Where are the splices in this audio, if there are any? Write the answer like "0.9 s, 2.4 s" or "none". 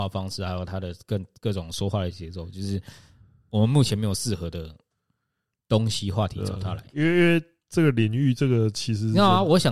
none